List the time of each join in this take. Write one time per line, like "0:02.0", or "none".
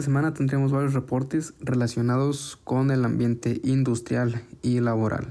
none